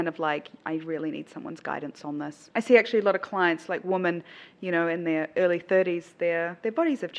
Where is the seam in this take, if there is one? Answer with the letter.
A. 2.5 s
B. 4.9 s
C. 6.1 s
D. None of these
A